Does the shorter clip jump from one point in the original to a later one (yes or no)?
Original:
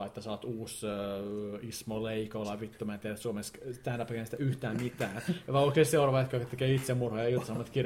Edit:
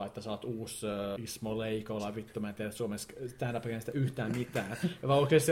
yes